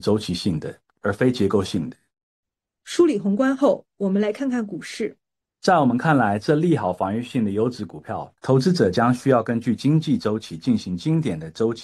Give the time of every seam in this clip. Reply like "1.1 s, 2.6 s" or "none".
5.4 s, 8.4 s